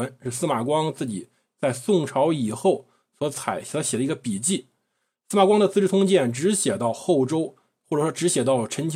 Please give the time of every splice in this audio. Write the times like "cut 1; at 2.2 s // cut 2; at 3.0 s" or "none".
none